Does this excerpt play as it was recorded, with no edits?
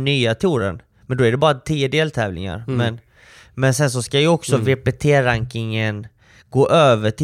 yes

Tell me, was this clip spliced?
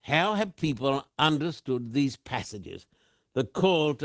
no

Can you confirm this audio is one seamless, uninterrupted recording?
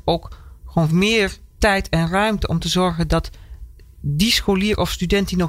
yes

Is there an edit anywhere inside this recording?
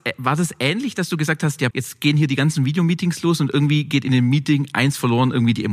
yes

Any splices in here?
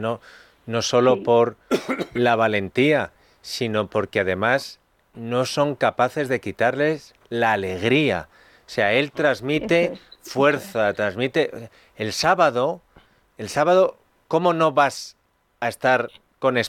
no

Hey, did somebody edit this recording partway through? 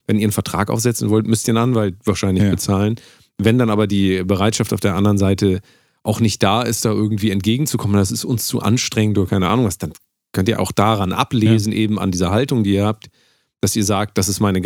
no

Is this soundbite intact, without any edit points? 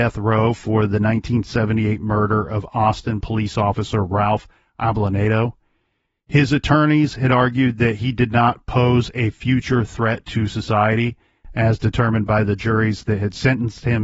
yes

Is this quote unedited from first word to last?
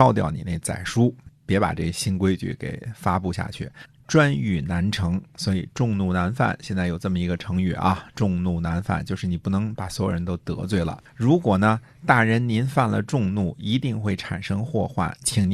no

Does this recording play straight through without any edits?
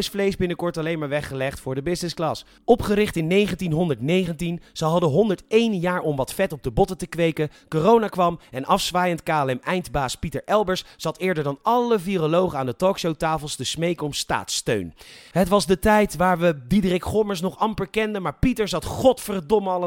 yes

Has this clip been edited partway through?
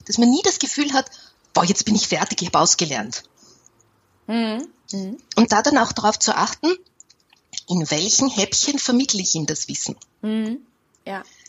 yes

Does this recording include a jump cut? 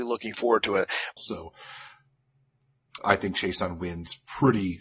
yes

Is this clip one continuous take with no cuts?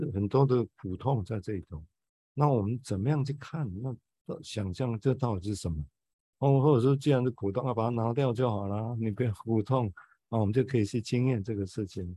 yes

